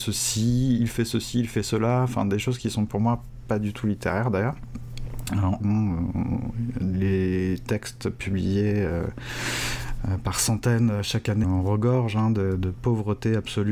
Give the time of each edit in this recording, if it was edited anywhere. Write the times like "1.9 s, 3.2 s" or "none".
5.6 s, 11.4 s